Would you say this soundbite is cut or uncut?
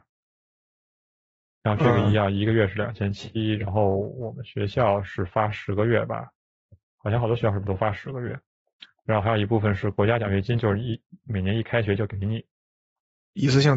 uncut